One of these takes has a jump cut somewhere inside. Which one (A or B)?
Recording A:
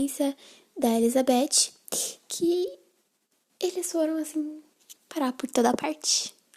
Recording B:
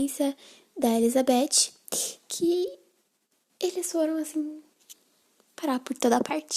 A